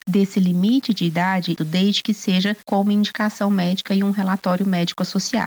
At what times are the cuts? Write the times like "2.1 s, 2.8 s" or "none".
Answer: 1.6 s